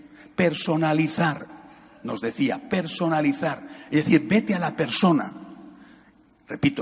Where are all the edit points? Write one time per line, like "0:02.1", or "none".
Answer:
none